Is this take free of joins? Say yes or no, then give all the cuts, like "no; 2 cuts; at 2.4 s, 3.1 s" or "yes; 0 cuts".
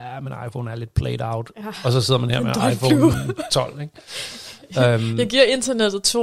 yes; 0 cuts